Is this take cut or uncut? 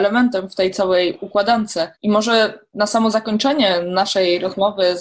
cut